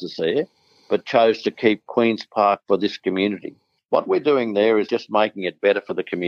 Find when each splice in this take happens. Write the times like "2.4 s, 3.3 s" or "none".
none